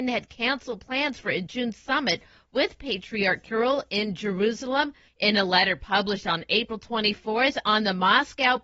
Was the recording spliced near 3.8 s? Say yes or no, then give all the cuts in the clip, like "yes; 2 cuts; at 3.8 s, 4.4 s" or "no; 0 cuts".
no; 1 cut; at 5.1 s